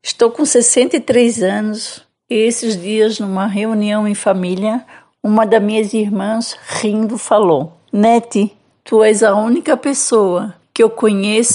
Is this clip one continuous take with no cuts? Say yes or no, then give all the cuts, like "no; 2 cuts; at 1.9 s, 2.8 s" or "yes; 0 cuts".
yes; 0 cuts